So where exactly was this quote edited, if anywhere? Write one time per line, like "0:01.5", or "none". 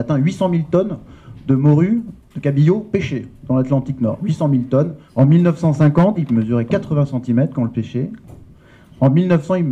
0:05.1
0:06.2